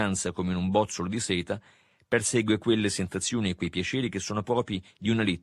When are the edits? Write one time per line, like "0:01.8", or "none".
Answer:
none